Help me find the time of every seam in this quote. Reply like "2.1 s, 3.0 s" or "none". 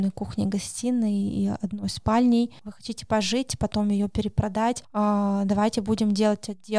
2.6 s